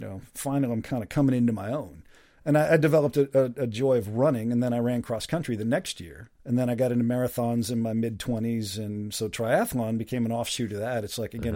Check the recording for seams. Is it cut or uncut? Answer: cut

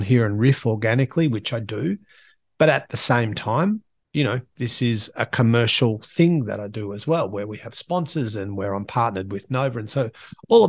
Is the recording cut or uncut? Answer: uncut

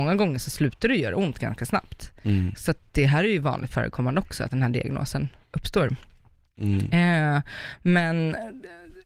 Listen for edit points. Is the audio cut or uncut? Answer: uncut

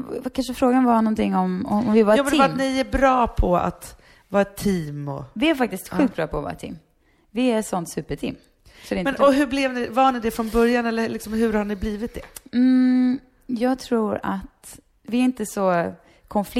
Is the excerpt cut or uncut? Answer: uncut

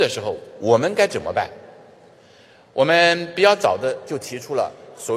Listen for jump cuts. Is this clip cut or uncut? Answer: uncut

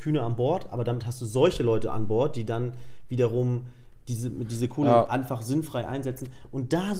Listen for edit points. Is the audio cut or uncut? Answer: uncut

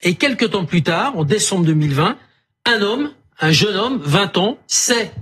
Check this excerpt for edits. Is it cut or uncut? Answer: uncut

